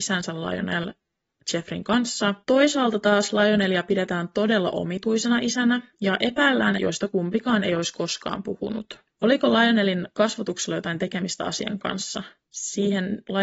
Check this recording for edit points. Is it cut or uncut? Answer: cut